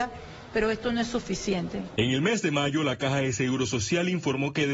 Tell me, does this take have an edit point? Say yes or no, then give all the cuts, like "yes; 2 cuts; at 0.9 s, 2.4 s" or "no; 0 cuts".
no; 0 cuts